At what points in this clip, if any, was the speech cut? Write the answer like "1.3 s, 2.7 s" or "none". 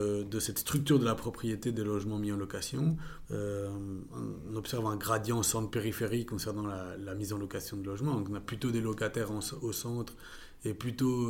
3.2 s